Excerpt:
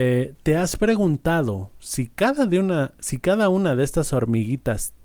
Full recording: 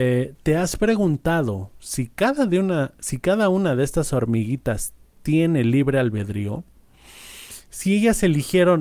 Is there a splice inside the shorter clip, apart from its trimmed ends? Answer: no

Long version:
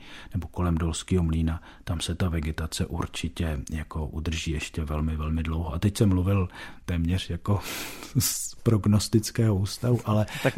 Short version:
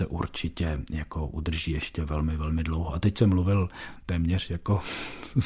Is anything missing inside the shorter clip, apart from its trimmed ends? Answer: no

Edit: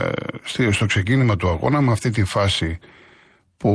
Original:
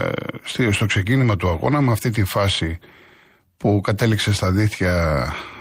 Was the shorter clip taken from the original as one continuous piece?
yes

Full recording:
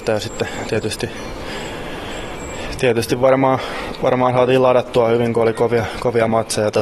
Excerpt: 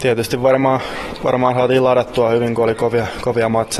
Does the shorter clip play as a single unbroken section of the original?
yes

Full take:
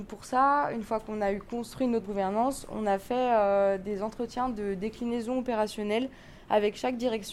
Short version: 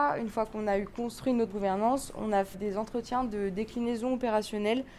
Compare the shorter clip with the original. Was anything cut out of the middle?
yes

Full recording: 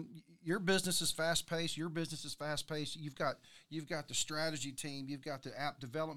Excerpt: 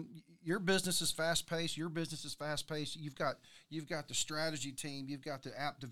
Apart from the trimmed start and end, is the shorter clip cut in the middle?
no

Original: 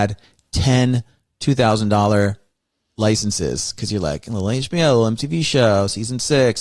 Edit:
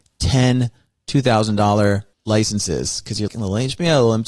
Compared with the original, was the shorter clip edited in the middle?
yes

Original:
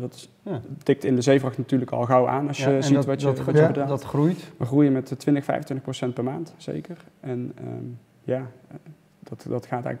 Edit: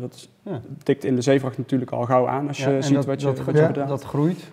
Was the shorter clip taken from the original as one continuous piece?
yes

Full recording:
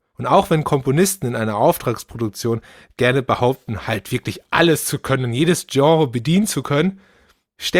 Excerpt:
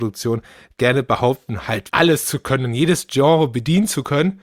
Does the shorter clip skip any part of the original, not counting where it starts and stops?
yes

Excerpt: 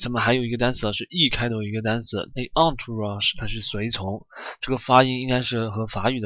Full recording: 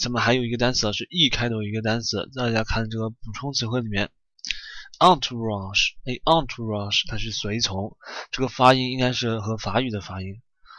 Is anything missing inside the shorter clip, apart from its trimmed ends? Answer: yes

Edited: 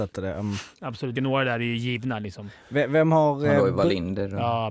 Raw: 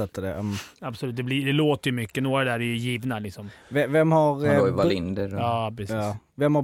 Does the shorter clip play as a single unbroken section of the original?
no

